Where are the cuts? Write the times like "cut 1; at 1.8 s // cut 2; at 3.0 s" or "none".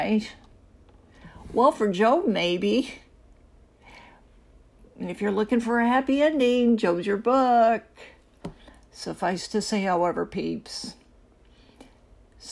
none